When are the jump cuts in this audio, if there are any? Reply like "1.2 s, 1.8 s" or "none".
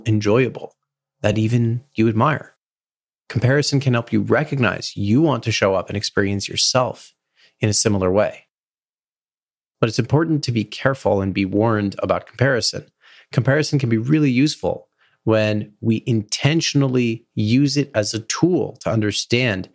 none